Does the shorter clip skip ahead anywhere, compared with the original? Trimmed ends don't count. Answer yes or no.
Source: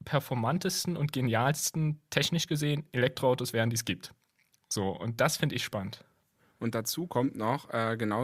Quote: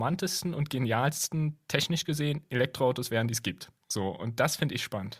yes